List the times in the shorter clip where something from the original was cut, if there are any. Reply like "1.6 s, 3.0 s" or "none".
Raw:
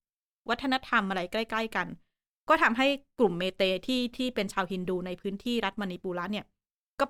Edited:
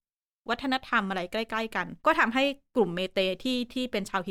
2.0 s